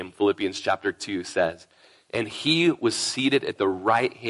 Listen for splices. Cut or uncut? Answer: uncut